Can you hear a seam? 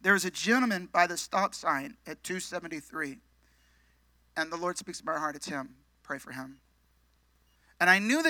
no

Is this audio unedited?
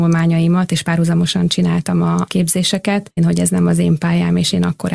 no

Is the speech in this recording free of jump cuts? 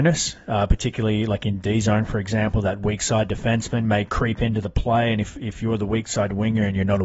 yes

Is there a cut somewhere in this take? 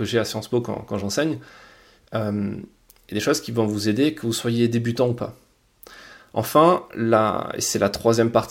no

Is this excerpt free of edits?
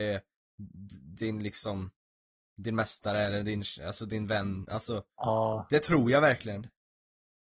yes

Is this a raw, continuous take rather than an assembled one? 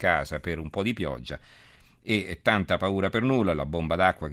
yes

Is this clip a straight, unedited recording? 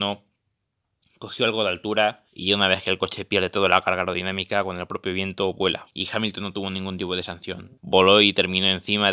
no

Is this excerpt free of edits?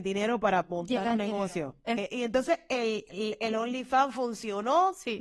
yes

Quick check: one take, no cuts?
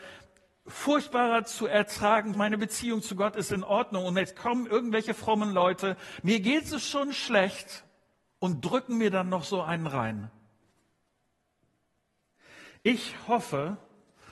no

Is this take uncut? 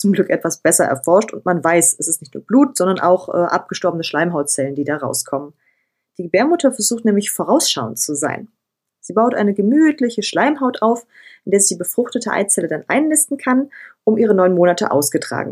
yes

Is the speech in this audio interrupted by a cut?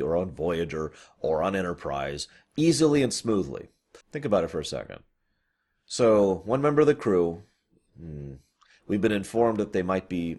yes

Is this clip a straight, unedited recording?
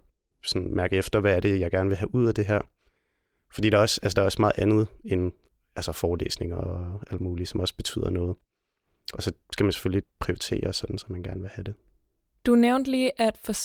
yes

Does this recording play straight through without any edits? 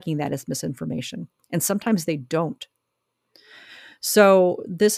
yes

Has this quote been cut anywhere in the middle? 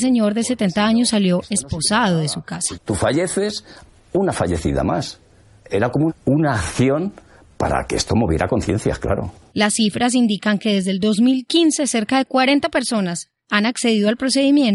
yes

